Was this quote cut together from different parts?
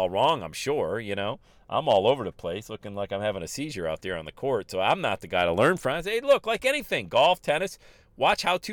no; 0 cuts

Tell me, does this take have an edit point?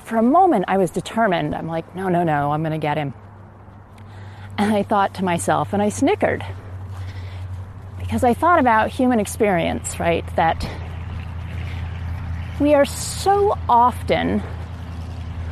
no; 0 cuts

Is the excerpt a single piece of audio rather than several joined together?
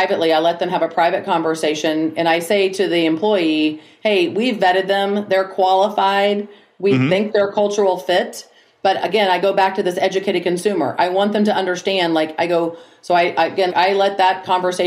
no; 1 cut; at 13.7 s

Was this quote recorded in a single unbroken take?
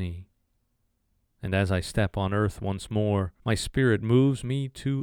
no; 2 cuts; at 1.2 s, 3.4 s

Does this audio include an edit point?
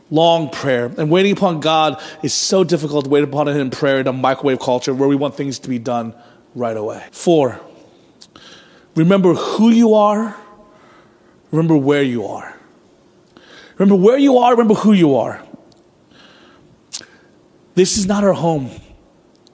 yes; 1 cut; at 7.1 s

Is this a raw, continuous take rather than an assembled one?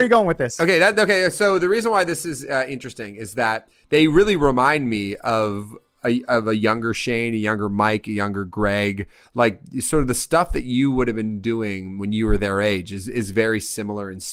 yes; 0 cuts

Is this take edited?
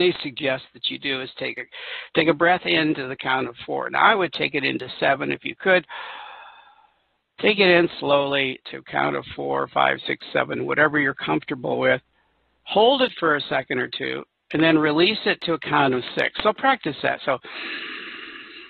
no; 0 cuts

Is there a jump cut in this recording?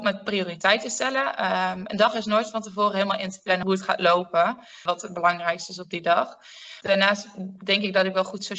yes; 1 cut; at 4.9 s

